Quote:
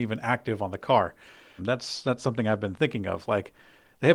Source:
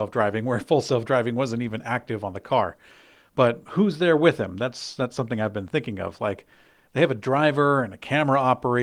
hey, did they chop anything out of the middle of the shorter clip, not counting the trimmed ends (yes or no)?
yes